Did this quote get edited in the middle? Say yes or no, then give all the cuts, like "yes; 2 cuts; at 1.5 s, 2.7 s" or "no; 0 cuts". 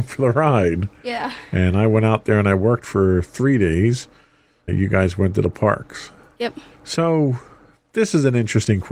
yes; 2 cuts; at 4.7 s, 6.7 s